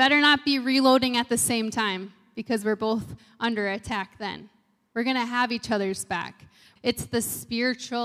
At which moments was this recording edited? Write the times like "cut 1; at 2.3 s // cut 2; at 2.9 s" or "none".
cut 1; at 6.8 s